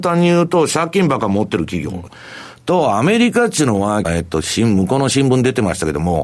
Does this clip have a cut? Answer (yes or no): yes